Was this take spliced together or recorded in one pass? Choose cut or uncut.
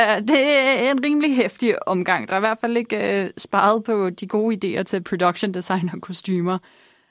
uncut